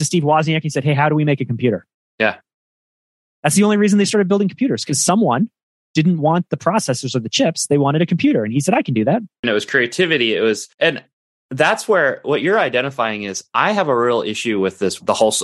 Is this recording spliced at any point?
yes; 2 cuts; at 9.4 s, 10.7 s

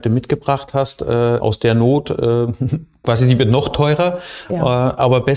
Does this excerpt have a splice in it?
yes; 1 cut; at 1.4 s

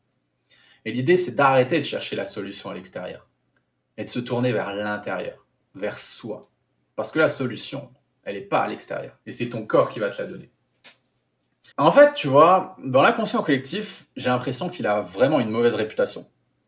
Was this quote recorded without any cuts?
no; 3 cuts; at 9.2 s, 11.7 s, 14.1 s

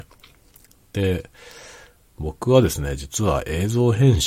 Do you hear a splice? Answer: no; 0 cuts

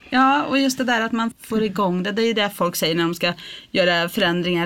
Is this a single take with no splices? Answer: no; 1 cut; at 1.3 s

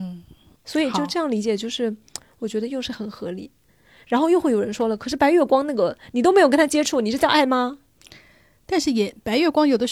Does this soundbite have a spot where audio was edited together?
no; 0 cuts

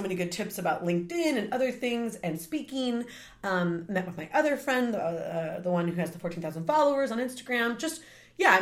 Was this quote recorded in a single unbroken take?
yes; 0 cuts

